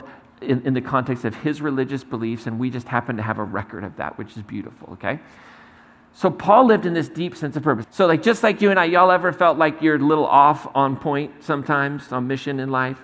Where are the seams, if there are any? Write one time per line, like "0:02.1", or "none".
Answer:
0:07.8
0:12.1